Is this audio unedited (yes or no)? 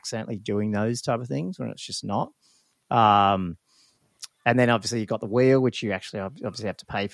yes